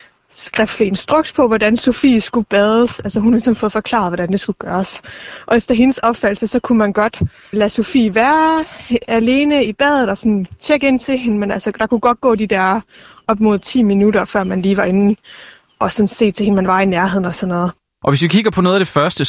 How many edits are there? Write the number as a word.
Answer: one